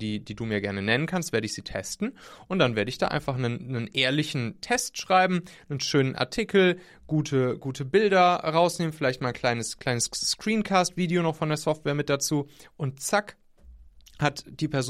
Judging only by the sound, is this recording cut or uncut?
uncut